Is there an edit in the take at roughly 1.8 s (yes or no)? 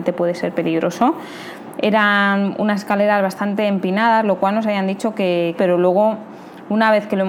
yes